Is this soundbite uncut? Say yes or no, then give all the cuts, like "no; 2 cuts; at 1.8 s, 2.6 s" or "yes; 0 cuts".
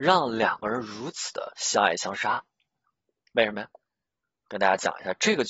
yes; 0 cuts